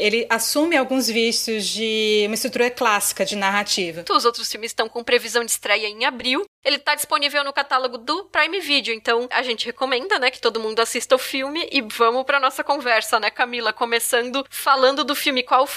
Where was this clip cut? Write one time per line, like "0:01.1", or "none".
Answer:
0:04.1